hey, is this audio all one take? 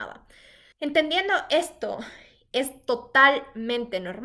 yes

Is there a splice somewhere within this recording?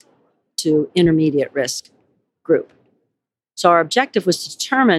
no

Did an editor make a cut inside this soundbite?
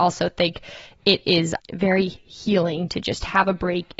yes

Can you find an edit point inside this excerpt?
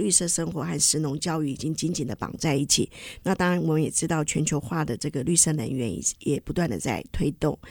yes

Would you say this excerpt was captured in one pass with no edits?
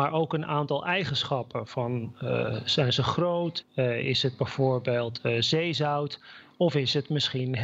no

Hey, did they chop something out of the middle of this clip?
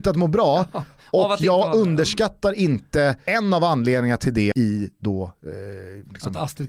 yes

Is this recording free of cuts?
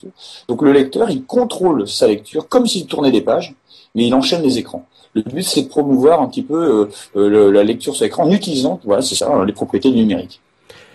yes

